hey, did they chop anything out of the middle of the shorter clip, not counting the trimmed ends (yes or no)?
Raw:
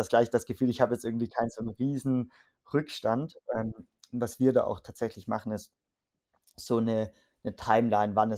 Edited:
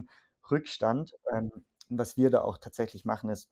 no